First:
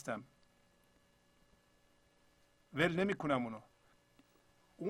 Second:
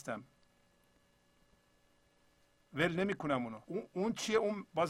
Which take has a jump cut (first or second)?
second